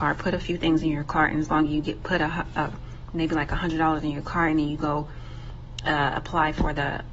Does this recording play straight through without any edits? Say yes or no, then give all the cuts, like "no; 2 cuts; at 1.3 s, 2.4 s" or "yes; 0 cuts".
yes; 0 cuts